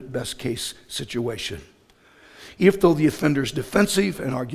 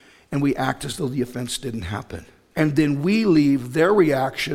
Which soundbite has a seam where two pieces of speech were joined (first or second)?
second